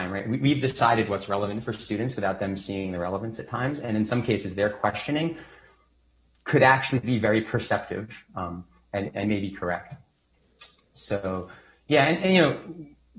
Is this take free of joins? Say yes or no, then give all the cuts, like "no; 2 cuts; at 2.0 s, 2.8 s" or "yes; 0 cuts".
yes; 0 cuts